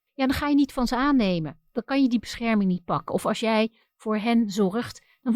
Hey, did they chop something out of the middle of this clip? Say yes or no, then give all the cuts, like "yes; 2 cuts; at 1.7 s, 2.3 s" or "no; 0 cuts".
no; 0 cuts